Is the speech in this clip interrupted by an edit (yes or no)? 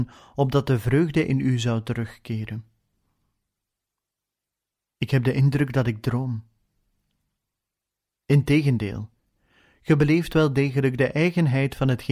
no